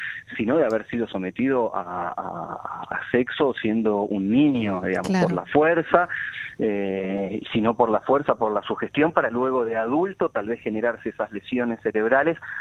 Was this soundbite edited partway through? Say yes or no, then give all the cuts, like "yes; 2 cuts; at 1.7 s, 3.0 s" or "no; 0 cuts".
yes; 1 cut; at 7.4 s